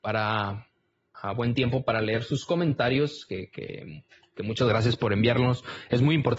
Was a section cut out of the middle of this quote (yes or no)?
yes